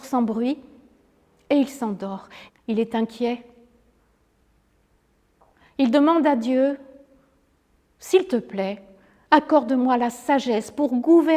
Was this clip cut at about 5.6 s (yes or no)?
no